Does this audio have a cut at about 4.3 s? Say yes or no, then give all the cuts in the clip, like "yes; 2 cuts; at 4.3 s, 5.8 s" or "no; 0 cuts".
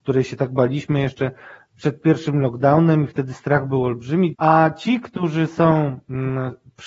yes; 1 cut; at 4.3 s